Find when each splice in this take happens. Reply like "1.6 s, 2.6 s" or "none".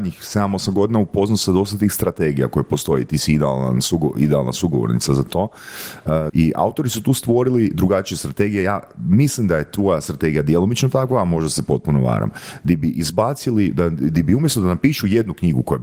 6.3 s